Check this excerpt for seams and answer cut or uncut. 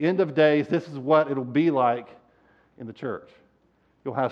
uncut